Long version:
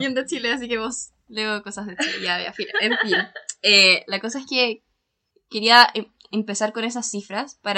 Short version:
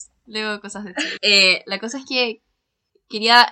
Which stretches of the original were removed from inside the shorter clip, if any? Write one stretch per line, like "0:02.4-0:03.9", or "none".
0:02.2-0:03.6